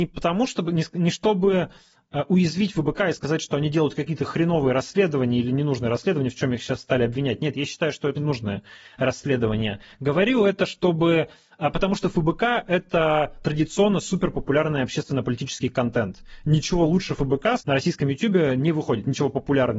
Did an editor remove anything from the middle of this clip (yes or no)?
yes